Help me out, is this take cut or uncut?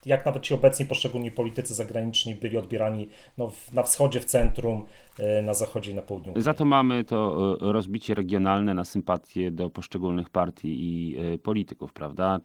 uncut